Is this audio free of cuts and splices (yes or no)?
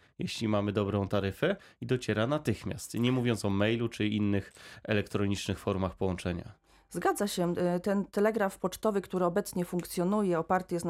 yes